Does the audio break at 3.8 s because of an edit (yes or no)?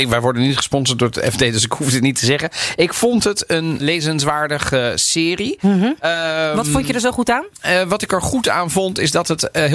yes